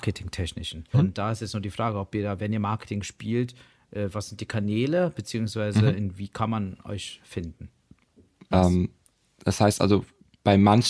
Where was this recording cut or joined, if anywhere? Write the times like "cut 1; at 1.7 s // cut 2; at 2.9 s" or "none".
cut 1; at 0.9 s // cut 2; at 8.5 s